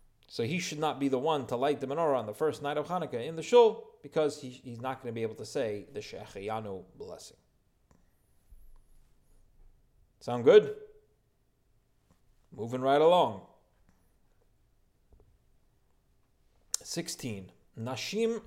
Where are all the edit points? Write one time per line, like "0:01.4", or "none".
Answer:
none